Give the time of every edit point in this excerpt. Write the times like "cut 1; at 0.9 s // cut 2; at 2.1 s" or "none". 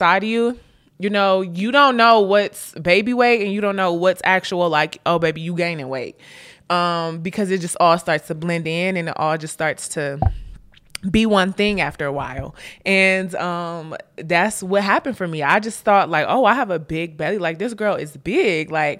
none